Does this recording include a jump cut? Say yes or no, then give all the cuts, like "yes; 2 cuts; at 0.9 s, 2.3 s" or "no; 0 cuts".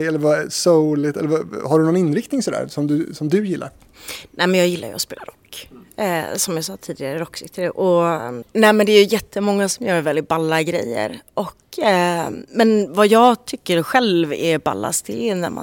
no; 0 cuts